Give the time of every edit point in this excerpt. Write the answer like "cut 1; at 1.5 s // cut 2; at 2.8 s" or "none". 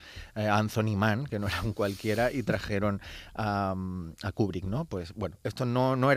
none